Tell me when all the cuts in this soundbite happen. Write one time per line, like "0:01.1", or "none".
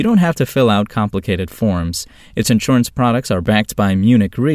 none

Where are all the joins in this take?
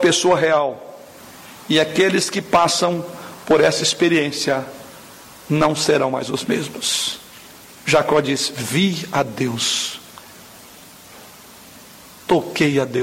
none

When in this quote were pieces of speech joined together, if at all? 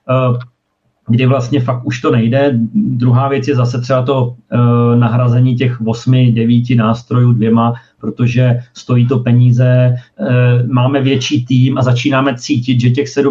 none

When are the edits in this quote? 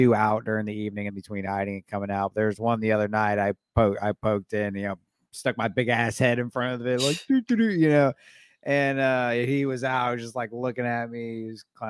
0:01.1

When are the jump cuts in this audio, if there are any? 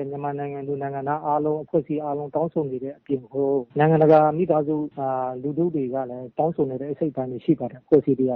0:03.7
0:04.9

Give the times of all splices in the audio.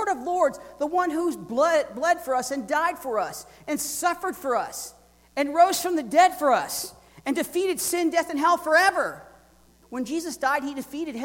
0:09.8

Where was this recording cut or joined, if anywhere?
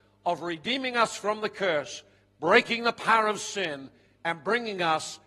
none

